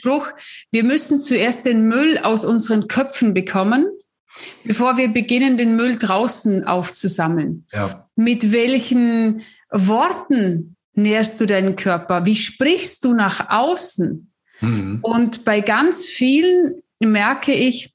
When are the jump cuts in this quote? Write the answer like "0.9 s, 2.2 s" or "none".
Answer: 8.1 s, 10.8 s